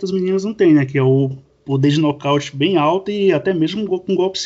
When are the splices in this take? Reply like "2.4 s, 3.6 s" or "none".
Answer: none